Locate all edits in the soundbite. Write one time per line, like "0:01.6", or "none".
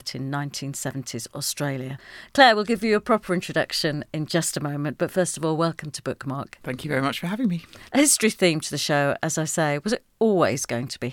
none